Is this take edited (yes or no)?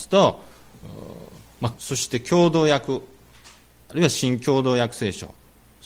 yes